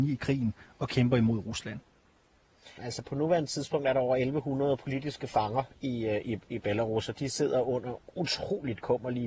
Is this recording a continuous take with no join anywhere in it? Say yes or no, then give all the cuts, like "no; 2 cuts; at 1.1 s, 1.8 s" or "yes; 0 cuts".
no; 1 cut; at 2.8 s